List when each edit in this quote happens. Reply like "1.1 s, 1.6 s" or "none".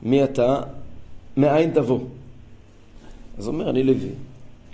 none